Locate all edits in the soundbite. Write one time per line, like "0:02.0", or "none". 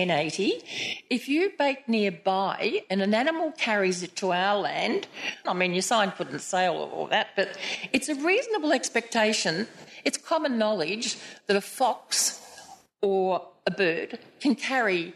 0:05.5

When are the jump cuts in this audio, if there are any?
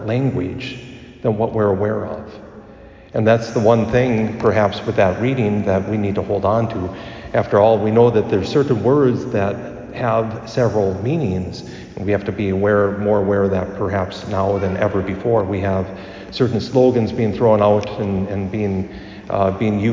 none

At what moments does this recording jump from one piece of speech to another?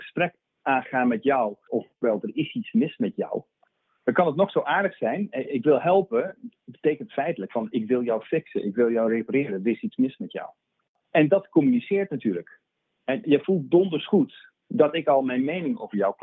0:01.7
0:13.2

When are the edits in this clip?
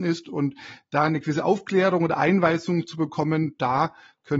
none

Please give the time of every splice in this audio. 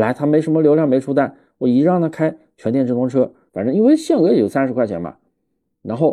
0:03.5

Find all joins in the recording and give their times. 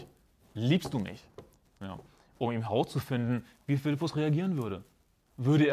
0:01.6

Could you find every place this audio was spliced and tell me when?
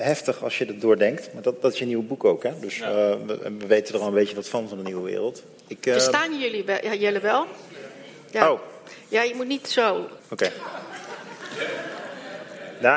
0:10.2

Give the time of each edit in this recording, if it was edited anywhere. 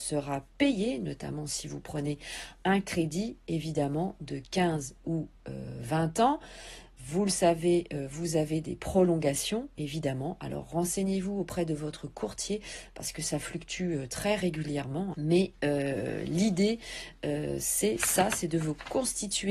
0:15.1

